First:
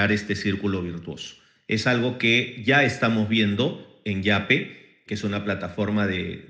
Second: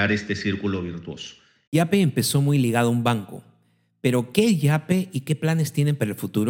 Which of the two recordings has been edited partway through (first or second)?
second